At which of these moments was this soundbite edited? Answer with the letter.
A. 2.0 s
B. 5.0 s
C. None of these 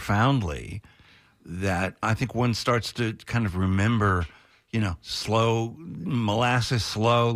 A